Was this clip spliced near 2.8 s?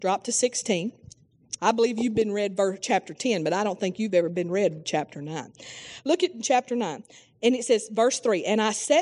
no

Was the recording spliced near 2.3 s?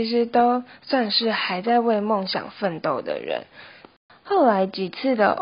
no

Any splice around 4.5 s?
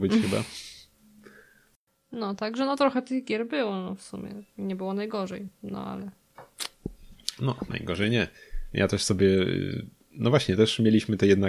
yes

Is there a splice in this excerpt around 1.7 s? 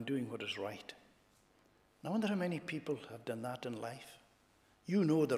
no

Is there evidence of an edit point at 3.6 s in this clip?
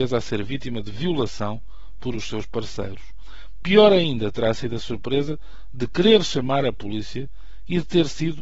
no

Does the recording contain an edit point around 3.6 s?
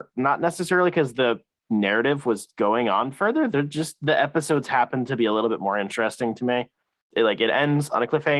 no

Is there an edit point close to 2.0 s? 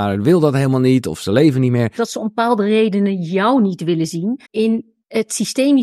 yes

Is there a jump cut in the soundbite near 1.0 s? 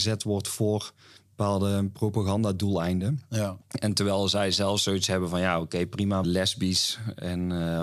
no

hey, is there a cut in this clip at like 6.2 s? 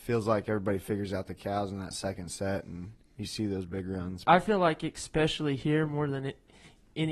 no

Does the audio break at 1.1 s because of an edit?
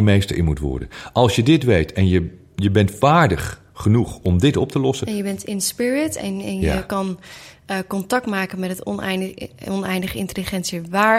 no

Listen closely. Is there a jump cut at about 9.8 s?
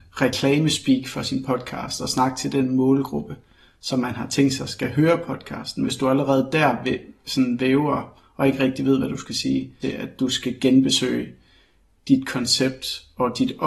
yes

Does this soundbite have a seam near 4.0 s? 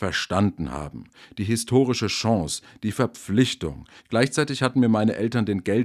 yes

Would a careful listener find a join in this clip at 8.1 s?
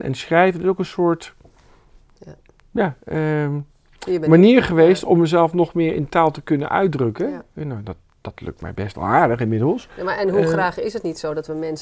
no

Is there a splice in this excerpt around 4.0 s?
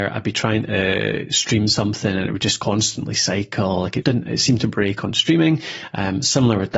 yes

